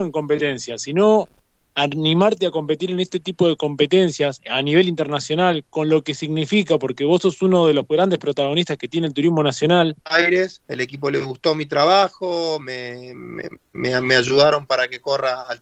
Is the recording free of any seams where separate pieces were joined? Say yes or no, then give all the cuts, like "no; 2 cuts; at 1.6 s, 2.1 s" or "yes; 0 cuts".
no; 1 cut; at 10.0 s